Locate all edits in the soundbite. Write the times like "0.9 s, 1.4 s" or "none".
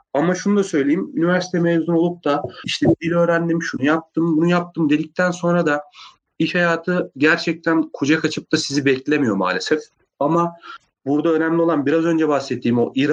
none